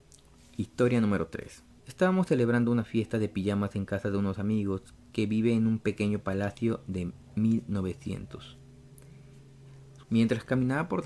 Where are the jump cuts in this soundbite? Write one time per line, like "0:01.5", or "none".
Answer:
0:01.8
0:10.0